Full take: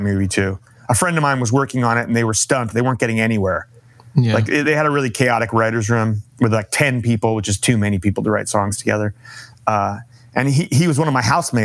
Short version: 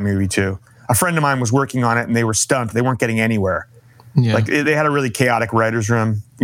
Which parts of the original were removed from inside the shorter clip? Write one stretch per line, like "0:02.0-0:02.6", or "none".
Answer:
none